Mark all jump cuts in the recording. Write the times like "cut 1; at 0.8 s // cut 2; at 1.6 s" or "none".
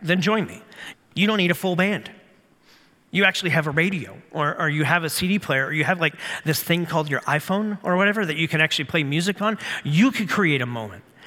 cut 1; at 0.9 s